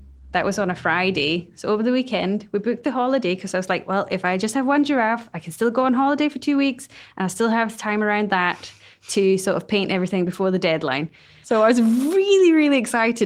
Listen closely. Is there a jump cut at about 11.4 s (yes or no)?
yes